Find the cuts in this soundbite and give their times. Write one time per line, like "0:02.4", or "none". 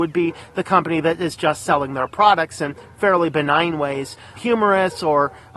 0:04.4